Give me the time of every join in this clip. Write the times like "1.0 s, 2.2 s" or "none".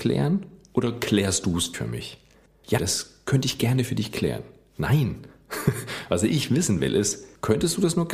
1.7 s, 2.8 s